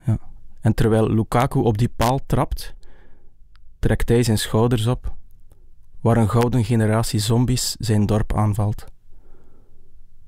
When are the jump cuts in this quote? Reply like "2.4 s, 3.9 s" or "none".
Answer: 5.9 s